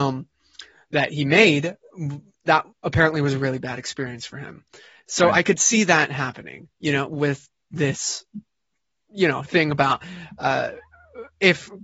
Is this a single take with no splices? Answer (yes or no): yes